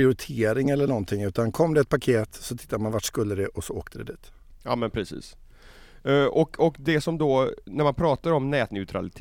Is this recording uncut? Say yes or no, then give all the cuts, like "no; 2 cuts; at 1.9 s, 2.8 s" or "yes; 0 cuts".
yes; 0 cuts